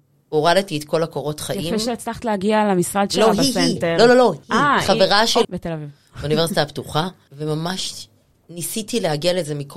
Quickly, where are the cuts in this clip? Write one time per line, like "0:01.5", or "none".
0:04.4
0:05.4